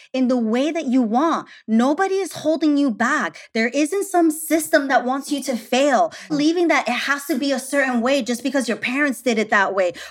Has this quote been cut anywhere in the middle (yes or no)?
yes